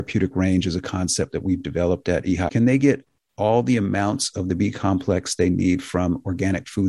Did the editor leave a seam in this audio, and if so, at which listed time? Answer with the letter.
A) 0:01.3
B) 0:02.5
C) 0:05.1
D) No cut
B